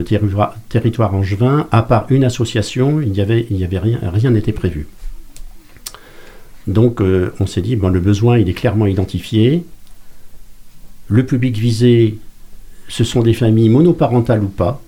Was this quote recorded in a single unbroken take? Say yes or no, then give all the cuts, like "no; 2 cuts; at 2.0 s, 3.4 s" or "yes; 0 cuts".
yes; 0 cuts